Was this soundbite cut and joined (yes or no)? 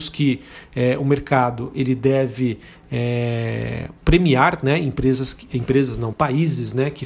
yes